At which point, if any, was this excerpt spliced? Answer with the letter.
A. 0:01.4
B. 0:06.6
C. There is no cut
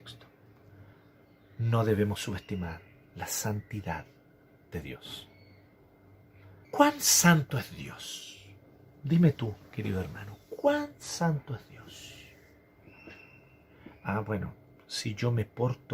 B